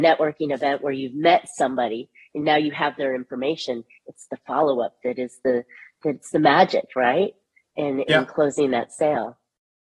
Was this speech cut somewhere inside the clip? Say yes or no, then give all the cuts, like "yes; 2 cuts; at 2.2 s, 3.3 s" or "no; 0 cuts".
no; 0 cuts